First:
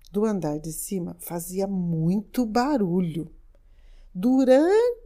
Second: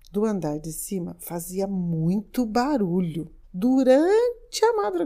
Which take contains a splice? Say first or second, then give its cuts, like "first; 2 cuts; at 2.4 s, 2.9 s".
second; 1 cut; at 3.4 s